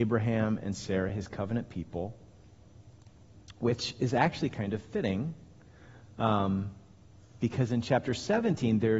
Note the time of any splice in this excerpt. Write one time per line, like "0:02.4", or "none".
none